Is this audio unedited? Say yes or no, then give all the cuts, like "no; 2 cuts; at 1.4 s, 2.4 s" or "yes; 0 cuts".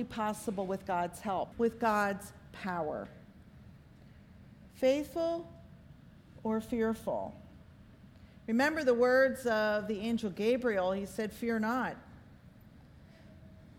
no; 2 cuts; at 1.5 s, 4.7 s